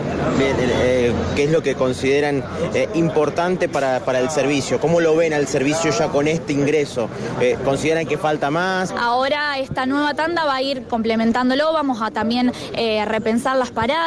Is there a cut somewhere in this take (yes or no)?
yes